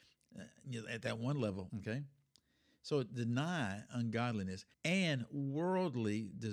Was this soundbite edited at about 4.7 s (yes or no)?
yes